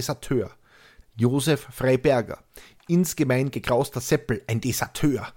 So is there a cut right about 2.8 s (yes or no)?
no